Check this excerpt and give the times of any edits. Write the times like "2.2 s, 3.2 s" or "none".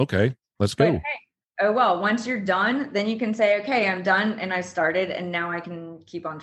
none

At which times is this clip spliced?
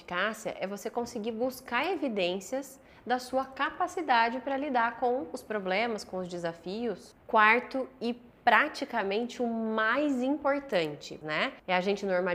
11.2 s

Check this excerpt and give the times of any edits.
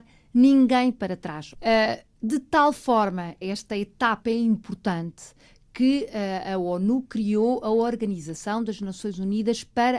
1.5 s, 3.4 s

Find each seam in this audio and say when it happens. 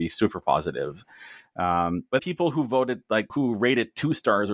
2.2 s, 3.3 s

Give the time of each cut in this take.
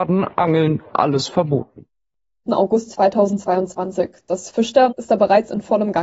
2.4 s, 4.9 s

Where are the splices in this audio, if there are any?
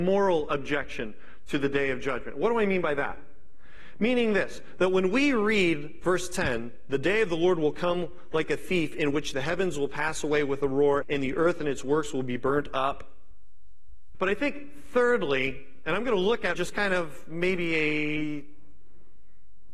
11.0 s, 14.1 s, 16.5 s

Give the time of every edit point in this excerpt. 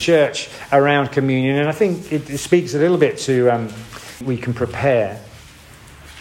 4.2 s

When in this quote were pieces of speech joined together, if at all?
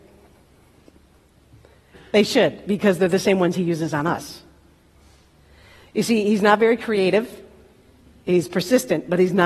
none

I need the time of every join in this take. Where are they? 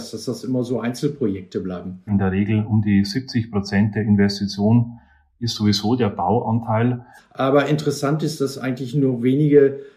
2.1 s, 7.2 s

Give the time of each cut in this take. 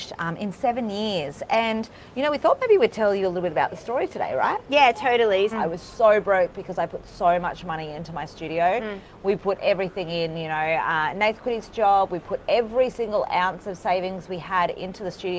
5.5 s

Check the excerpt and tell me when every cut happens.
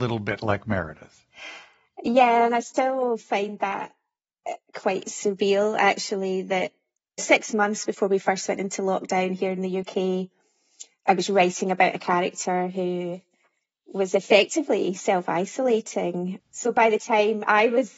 16.4 s

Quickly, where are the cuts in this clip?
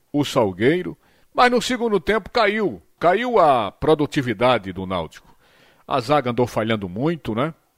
1.2 s, 3.0 s

